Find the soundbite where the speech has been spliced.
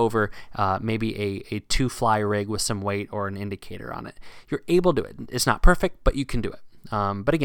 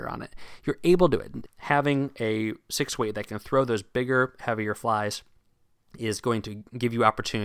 second; 1 cut; at 1.5 s

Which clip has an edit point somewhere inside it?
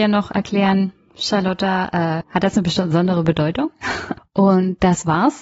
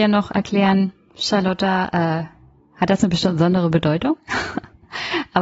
first; 2 cuts; at 2.2 s, 4.2 s

